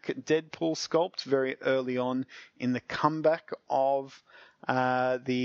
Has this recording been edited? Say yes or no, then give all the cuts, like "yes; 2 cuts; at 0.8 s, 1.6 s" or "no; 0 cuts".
no; 0 cuts